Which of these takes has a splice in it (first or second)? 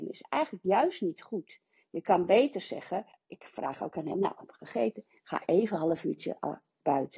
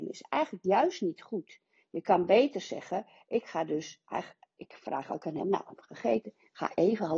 first